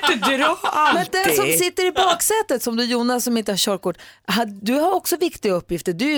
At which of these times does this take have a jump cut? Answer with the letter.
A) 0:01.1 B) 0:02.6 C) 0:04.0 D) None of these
D